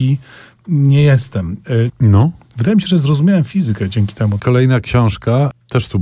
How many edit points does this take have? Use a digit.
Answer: 2